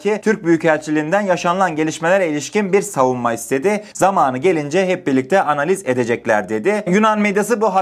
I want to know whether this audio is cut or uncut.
cut